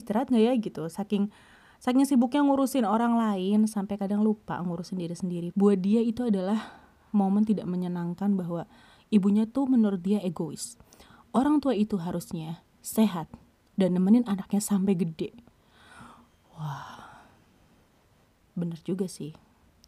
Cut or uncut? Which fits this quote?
cut